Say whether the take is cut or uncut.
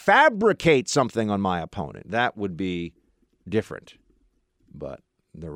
cut